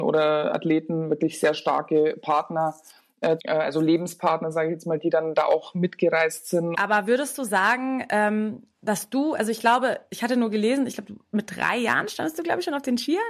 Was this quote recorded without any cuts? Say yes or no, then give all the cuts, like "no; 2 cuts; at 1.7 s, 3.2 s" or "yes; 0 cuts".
no; 2 cuts; at 3.4 s, 6.7 s